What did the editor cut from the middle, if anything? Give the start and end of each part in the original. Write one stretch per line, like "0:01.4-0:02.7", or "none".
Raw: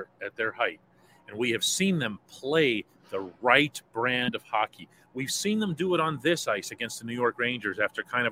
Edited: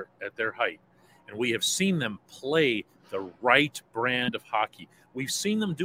none